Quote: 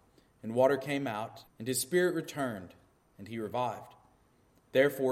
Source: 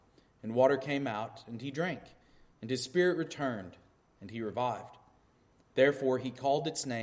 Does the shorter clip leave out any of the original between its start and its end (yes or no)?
yes